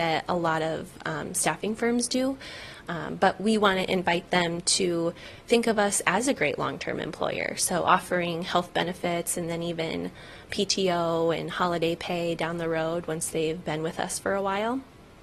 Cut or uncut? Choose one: uncut